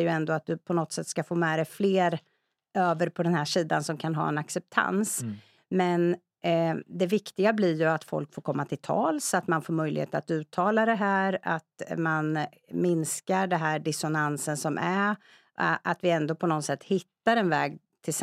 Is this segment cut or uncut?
cut